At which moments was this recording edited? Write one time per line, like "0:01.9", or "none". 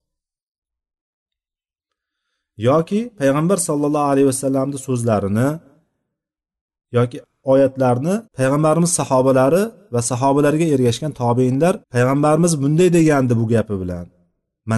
0:08.3
0:11.8